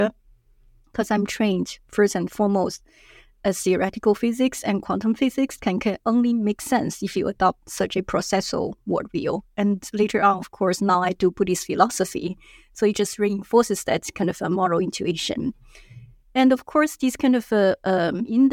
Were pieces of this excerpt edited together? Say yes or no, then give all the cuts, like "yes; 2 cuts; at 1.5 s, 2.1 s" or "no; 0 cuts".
no; 0 cuts